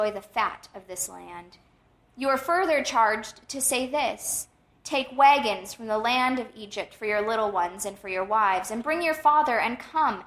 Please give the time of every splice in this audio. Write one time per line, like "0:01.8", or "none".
none